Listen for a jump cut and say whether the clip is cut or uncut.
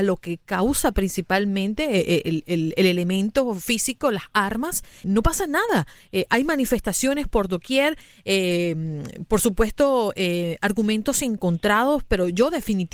cut